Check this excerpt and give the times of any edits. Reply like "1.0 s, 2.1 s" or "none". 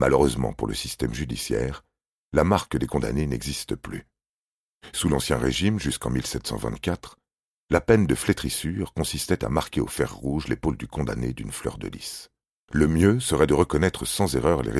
12.7 s